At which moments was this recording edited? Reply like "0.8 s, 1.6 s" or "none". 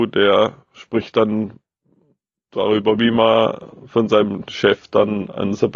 3.0 s